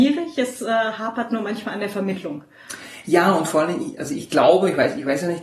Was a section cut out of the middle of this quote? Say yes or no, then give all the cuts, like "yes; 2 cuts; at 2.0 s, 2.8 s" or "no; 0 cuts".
no; 0 cuts